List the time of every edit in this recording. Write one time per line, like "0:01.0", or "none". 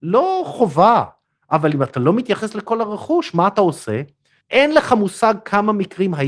0:04.4